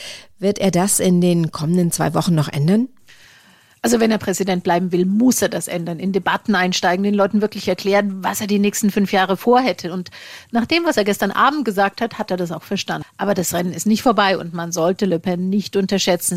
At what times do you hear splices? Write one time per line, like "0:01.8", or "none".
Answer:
0:13.0